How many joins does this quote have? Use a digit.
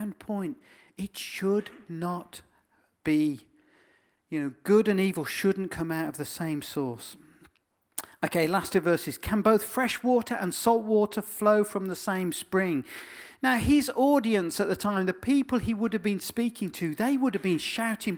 0